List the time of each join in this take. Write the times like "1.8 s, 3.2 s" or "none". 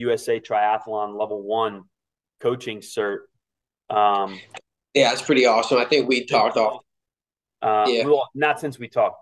7.4 s